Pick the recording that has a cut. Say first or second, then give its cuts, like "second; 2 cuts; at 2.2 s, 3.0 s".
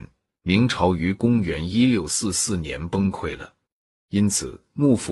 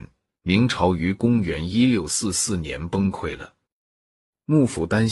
first; 1 cut; at 4.1 s